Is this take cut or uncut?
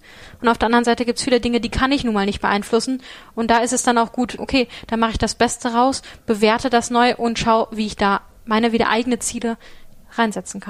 cut